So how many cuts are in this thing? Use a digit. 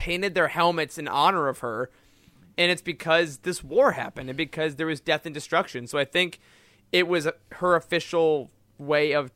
0